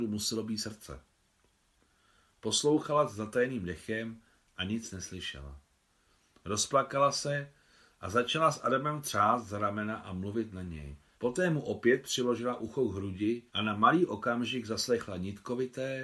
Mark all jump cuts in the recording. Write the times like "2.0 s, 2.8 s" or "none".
11.1 s, 13.5 s